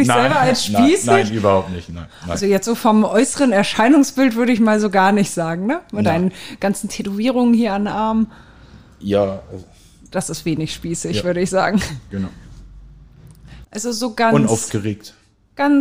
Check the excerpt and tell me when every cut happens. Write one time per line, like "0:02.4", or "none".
0:13.6